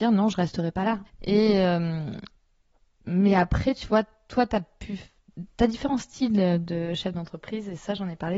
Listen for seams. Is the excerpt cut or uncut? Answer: cut